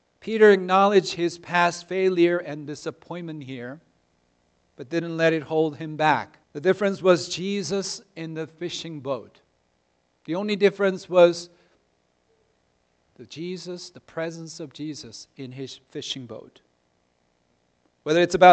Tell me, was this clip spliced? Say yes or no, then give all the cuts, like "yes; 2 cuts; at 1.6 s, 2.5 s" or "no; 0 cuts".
yes; 1 cut; at 6.4 s